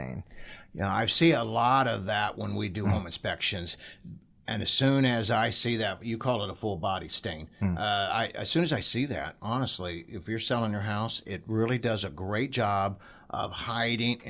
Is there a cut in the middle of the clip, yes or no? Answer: no